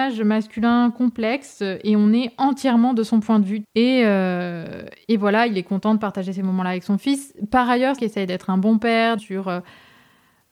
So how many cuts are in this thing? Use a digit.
3